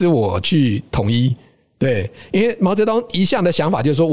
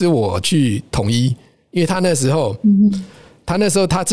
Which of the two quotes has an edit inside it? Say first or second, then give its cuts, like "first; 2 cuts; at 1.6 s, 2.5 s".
second; 1 cut; at 1.7 s